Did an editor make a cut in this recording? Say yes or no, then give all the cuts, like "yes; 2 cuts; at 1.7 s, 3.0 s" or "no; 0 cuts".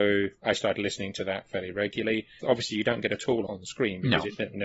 yes; 2 cuts; at 2.4 s, 3.5 s